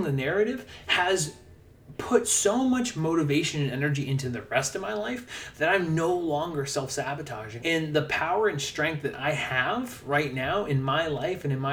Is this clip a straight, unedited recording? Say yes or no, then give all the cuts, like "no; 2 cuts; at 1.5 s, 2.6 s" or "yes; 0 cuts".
no; 1 cut; at 7.6 s